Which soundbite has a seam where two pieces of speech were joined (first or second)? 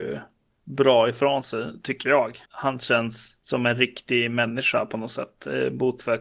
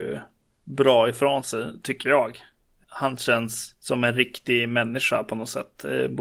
first